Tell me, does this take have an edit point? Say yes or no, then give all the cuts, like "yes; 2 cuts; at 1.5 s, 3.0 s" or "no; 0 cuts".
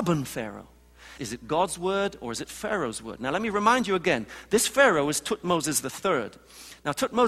yes; 1 cut; at 1.2 s